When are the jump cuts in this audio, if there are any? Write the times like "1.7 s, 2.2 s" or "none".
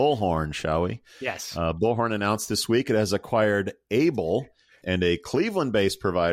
4.8 s